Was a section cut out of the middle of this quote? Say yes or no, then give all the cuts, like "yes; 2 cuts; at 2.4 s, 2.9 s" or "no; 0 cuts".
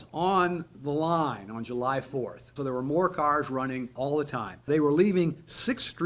yes; 1 cut; at 2.6 s